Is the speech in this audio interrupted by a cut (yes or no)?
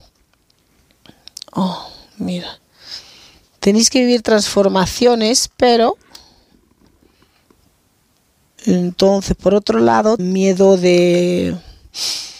yes